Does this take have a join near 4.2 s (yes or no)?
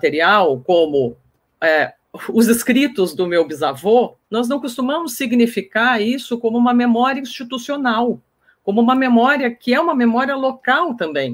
yes